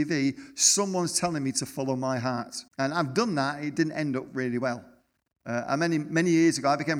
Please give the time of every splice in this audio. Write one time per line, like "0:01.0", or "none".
0:02.7